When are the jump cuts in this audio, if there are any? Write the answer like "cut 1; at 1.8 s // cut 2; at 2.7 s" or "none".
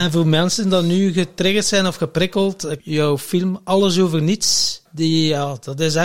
cut 1; at 2.8 s // cut 2; at 4.9 s